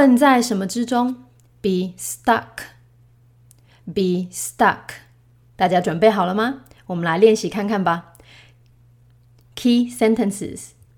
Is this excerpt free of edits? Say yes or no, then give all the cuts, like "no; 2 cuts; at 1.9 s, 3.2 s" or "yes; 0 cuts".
no; 1 cut; at 5.5 s